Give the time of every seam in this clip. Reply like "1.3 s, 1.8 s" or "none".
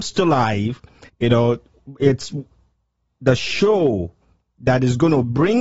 1.1 s